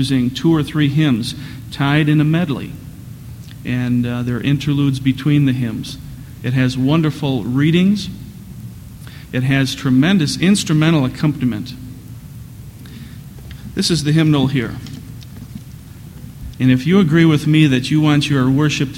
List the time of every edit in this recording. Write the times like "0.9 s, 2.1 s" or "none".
6.4 s, 16.5 s